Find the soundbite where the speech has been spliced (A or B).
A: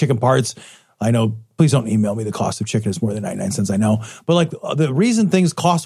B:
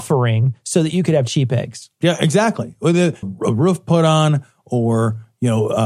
B